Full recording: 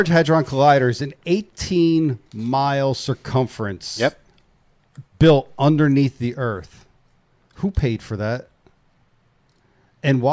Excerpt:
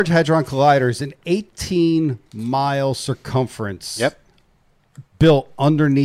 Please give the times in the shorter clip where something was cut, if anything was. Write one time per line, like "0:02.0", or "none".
none